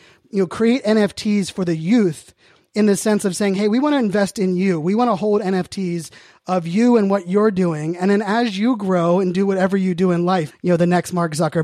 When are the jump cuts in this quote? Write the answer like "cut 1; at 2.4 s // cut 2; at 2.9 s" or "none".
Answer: cut 1; at 10.5 s